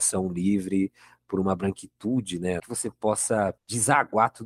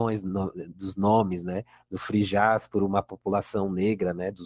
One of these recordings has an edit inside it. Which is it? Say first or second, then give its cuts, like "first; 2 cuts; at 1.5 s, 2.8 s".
first; 1 cut; at 2.6 s